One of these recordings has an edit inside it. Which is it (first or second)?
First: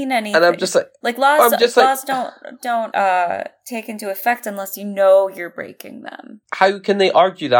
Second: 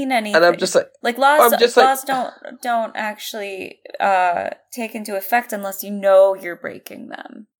first